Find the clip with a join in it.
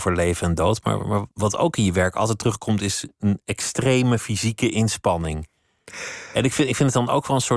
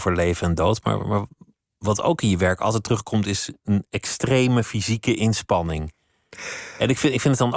first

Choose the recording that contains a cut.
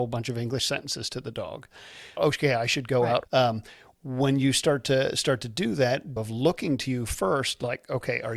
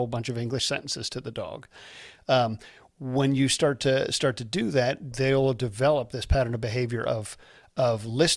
first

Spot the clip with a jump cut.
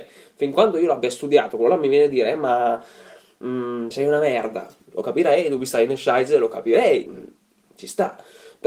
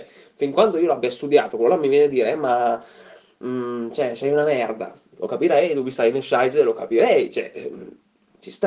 first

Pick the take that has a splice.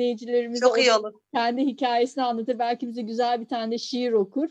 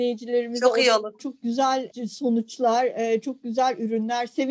second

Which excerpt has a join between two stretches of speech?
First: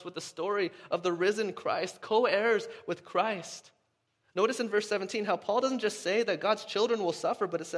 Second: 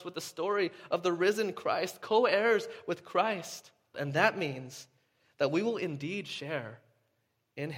second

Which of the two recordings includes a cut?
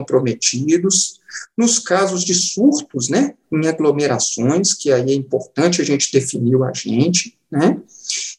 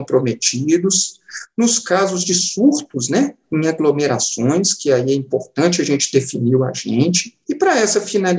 second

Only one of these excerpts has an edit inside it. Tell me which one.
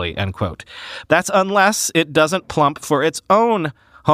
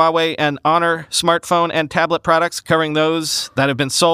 first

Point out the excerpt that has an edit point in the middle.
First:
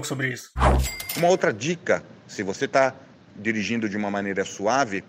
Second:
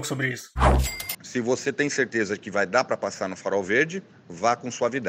second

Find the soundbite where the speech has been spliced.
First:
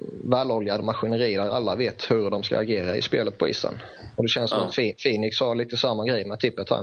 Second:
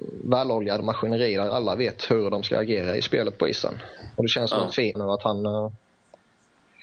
second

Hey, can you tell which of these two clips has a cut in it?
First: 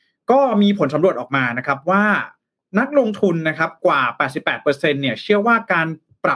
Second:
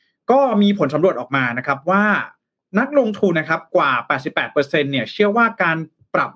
second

